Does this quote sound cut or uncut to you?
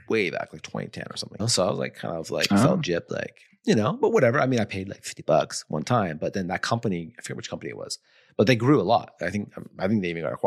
cut